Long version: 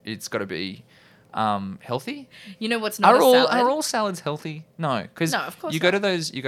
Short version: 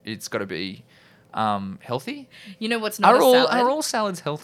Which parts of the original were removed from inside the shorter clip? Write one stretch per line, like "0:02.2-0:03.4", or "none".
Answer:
none